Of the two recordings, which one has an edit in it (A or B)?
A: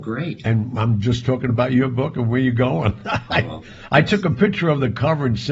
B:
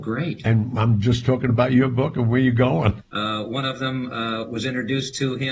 B